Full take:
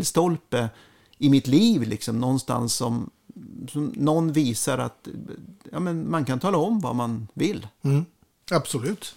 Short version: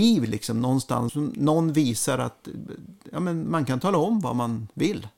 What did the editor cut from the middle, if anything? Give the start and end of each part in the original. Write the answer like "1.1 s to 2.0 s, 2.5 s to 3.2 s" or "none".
2.7 s to 3.7 s